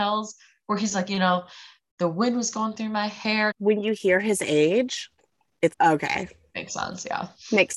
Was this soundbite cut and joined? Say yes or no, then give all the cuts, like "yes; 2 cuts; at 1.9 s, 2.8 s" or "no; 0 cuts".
yes; 2 cuts; at 3.5 s, 5.7 s